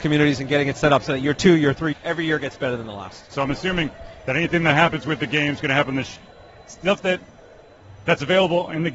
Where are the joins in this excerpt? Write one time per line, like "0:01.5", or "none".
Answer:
0:01.9
0:03.3